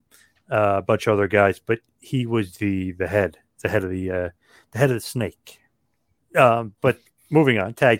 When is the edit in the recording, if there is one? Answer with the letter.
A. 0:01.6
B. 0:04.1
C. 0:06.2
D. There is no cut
C